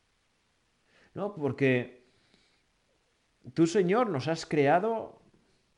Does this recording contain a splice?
no; 0 cuts

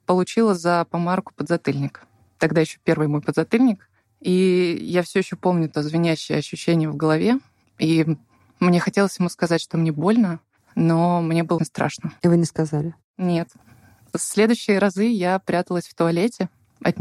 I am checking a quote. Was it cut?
yes; 1 cut; at 11.6 s

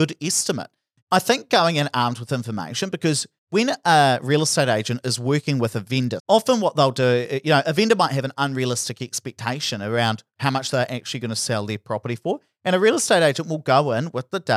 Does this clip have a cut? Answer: yes; 2 cuts; at 1.0 s, 6.2 s

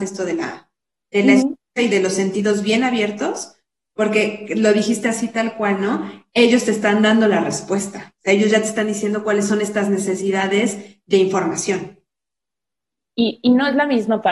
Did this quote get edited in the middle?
no; 0 cuts

